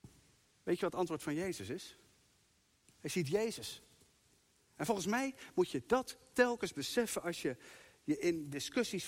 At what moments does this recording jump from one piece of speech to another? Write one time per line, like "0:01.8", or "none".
0:02.8